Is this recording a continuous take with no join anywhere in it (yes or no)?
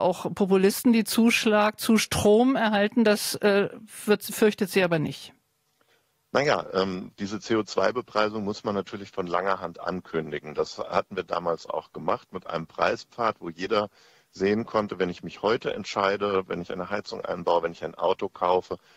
yes